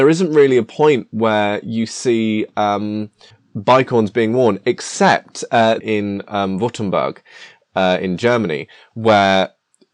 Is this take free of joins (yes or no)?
no